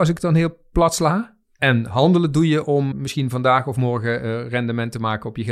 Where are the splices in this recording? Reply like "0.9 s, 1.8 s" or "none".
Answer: 2.9 s